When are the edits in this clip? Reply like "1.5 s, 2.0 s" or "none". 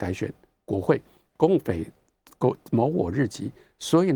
none